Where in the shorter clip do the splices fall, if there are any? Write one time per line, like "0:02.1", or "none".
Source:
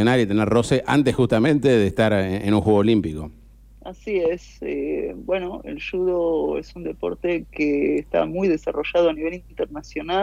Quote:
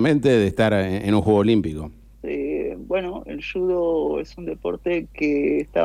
0:02.2